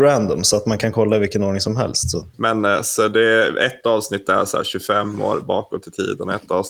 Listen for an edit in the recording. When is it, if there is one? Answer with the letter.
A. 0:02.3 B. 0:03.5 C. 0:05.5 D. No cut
A